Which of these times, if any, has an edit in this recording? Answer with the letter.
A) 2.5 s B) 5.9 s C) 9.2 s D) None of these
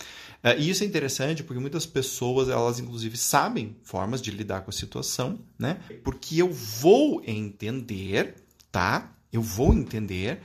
B